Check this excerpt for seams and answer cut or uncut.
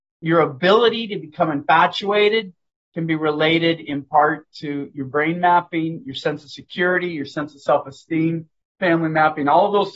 uncut